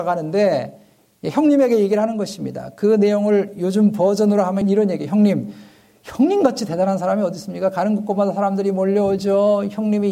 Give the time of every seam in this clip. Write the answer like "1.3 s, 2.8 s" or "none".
4.6 s

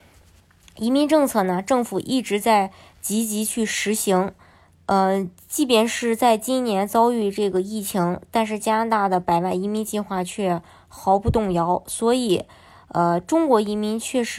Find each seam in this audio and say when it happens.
none

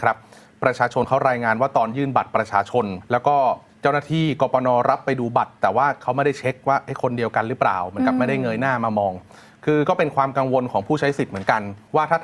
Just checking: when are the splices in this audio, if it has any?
3.1 s

